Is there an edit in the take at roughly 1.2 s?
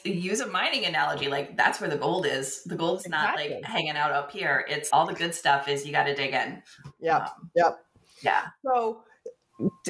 no; 1 cut; at 4.9 s

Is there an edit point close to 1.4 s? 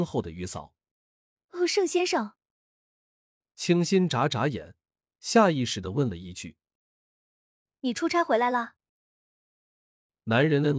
yes; 1 cut; at 1.4 s

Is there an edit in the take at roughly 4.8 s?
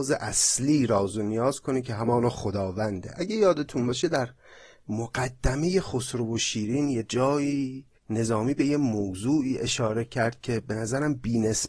no; 1 cut; at 8.0 s

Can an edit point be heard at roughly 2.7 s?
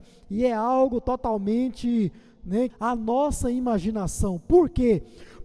yes; 1 cut; at 2.7 s

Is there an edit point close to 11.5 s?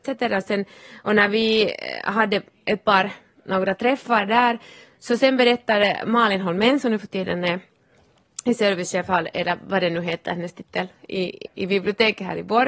yes; 1 cut; at 11.5 s

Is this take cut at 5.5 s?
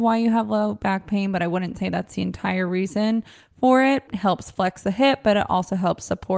no; 1 cut; at 4.1 s

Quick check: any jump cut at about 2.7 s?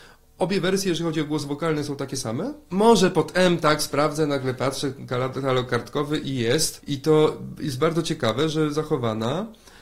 yes; 1 cut; at 2.7 s

